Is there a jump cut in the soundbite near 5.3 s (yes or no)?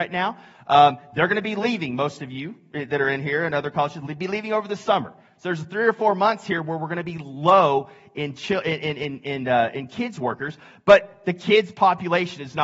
no